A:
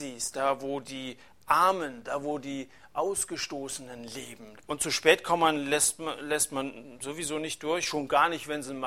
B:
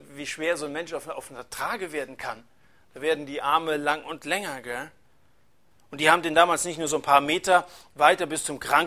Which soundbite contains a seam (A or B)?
A